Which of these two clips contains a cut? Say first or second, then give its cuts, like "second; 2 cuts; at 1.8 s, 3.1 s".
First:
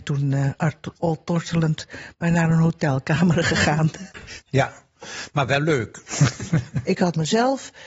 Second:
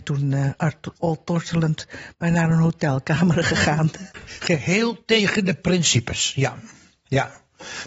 first; 1 cut; at 4.4 s